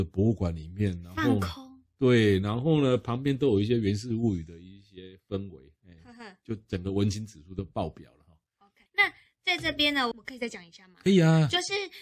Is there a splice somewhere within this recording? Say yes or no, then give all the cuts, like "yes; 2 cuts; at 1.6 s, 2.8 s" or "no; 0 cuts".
yes; 2 cuts; at 8.9 s, 10.1 s